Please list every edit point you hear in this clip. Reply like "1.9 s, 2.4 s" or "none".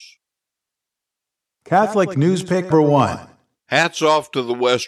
2.7 s